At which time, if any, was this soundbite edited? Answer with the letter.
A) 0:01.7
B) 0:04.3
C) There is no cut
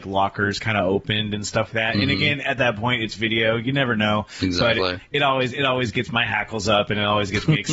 A